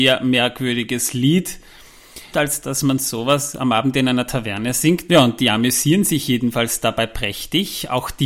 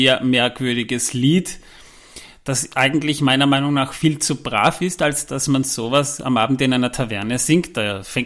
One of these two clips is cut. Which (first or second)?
first